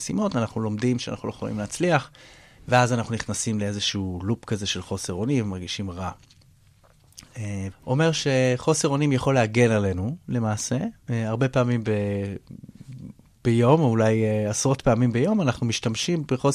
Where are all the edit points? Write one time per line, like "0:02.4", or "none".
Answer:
0:07.7